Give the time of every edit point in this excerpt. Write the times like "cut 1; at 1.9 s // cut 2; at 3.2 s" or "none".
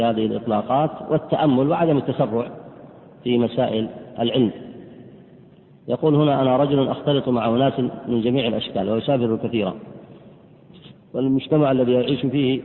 none